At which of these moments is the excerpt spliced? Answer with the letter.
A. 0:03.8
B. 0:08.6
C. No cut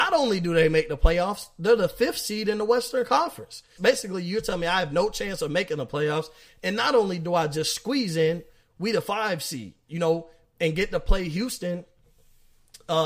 A